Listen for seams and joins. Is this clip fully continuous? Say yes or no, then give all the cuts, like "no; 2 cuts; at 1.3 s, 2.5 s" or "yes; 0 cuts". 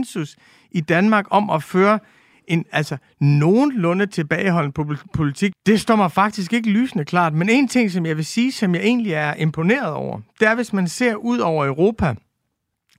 no; 1 cut; at 5.5 s